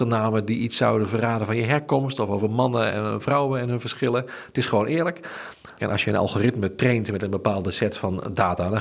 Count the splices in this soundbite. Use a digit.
1